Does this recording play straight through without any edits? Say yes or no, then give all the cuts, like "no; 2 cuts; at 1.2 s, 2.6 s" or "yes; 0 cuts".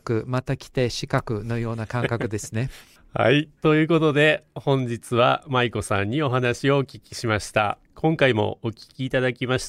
no; 2 cuts; at 3.6 s, 7.8 s